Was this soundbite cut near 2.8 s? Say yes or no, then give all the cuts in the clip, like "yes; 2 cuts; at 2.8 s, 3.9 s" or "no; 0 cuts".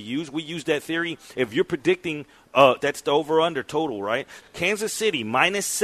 yes; 3 cuts; at 1.3 s, 2.8 s, 4.4 s